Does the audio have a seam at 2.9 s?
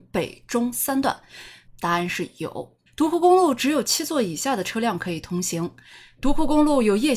yes; 2 cuts; at 1.6 s, 2.9 s

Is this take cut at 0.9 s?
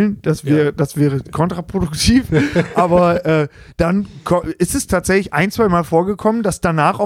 no; 0 cuts

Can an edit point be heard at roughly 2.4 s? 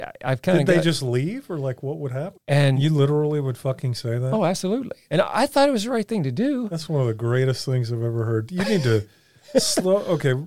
yes; 1 cut; at 2.4 s

